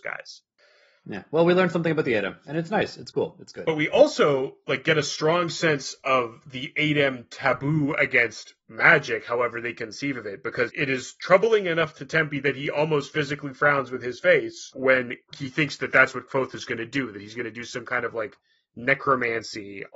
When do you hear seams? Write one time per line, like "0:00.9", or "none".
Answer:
0:10.7
0:15.3